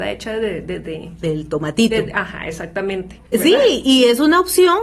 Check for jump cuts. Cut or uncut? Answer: cut